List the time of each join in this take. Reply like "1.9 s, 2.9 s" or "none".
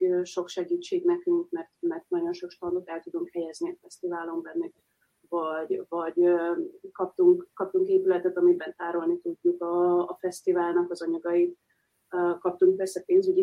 none